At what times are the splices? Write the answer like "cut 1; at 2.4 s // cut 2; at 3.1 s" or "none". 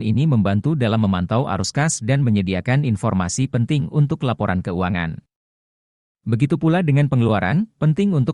none